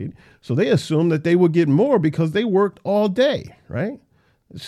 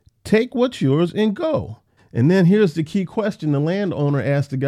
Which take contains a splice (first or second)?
second